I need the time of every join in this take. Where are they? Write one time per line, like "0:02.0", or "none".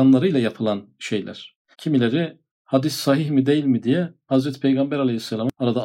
0:01.7